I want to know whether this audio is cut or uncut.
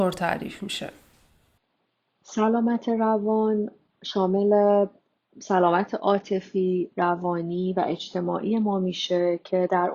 uncut